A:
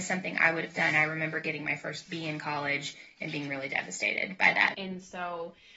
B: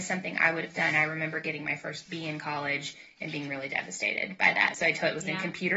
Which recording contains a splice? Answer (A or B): A